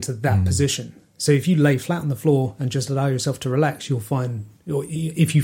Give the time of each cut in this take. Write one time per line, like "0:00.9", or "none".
none